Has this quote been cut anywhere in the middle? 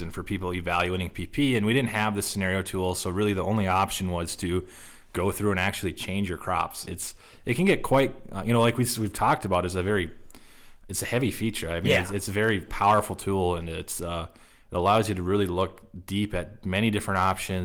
yes; 1 cut; at 6.9 s

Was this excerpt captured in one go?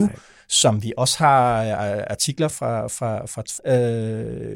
no; 2 cuts; at 2.5 s, 3.6 s

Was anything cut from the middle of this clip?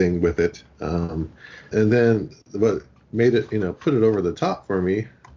yes; 1 cut; at 1.7 s

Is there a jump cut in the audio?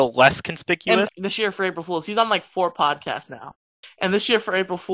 yes; 1 cut; at 1.1 s

